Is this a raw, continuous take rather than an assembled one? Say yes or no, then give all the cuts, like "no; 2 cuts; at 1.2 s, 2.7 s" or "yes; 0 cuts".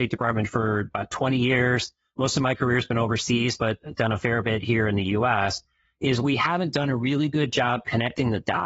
yes; 0 cuts